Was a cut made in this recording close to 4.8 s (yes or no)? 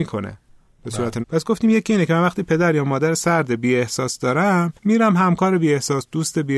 yes